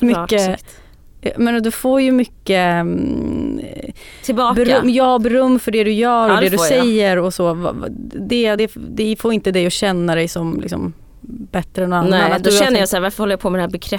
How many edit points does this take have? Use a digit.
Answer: 0